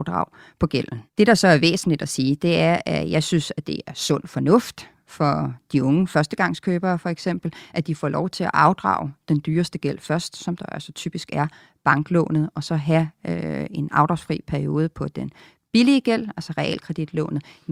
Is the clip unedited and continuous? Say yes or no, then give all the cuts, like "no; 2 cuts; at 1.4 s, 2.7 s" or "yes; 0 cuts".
no; 1 cut; at 1.1 s